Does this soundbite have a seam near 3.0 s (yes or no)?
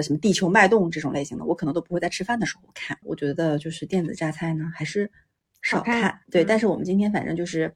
yes